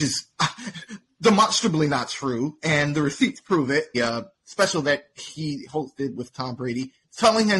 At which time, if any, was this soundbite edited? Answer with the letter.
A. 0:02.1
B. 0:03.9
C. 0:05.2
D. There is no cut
B